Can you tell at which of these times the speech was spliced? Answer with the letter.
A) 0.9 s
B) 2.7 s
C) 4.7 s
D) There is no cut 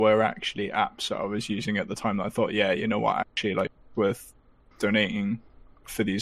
C